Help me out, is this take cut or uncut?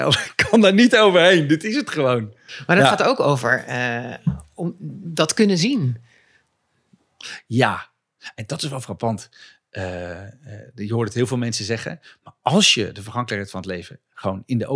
uncut